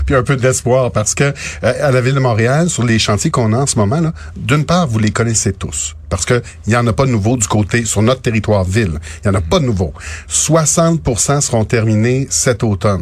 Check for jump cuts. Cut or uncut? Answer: uncut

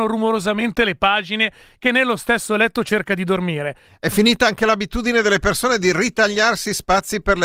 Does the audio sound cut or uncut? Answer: cut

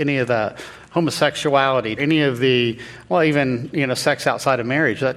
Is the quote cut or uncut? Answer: cut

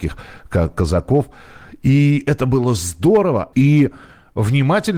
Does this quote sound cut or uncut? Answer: cut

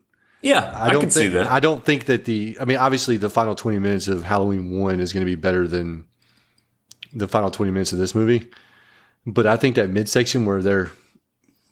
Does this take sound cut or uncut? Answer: uncut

